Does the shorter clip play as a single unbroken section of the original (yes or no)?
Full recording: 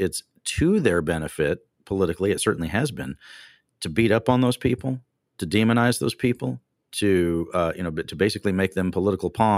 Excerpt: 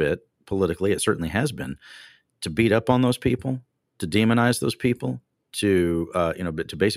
yes